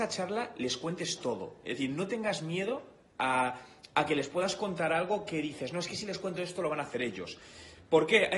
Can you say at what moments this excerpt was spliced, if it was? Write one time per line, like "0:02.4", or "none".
none